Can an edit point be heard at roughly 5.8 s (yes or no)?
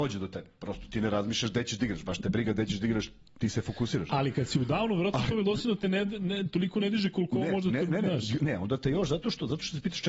no